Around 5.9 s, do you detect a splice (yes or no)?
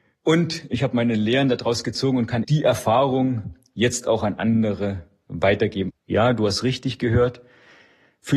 yes